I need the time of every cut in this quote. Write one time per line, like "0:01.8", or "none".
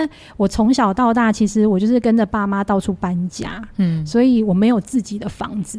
none